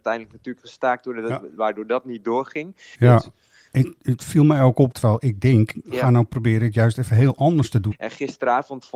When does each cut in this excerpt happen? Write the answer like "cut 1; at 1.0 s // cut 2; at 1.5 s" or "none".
cut 1; at 2.9 s // cut 2; at 4.9 s // cut 3; at 7.9 s